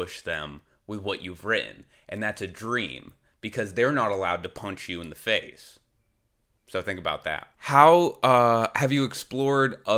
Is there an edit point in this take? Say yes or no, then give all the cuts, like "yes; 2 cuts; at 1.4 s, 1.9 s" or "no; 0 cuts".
yes; 1 cut; at 7.5 s